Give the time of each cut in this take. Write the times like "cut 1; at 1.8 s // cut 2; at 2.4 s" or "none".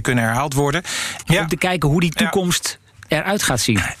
cut 1; at 1.2 s